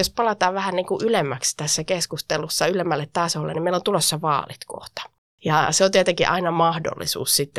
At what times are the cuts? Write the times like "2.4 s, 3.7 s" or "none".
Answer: none